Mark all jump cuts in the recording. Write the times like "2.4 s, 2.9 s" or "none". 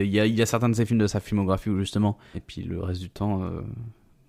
2.3 s